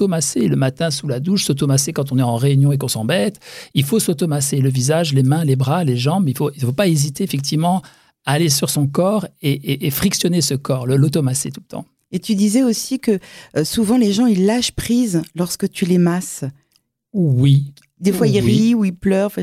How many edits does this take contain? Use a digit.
0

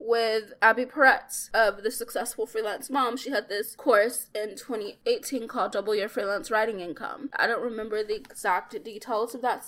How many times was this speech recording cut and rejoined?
1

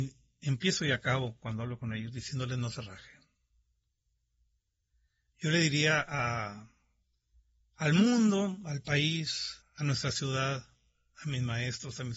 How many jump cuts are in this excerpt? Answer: 1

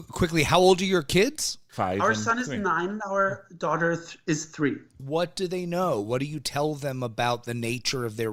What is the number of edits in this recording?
0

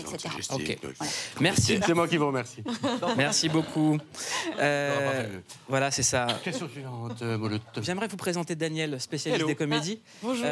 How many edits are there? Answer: 1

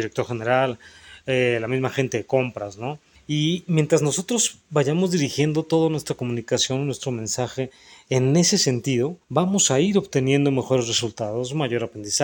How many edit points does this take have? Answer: 2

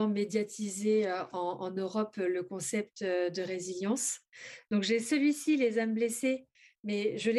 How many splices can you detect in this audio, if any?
0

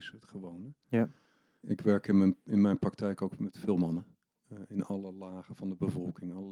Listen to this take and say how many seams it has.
1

